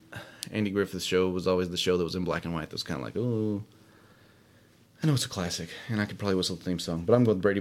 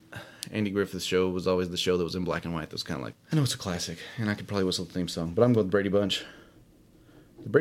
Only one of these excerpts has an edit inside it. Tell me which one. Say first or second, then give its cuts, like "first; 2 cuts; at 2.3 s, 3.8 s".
second; 1 cut; at 3.1 s